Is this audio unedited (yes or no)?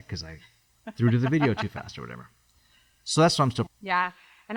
no